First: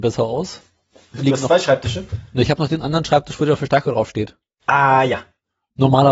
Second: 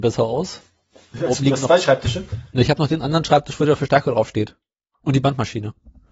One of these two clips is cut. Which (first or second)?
first